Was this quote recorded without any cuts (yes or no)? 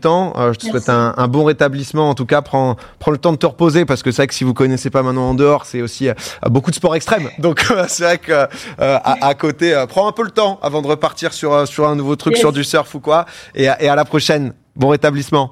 yes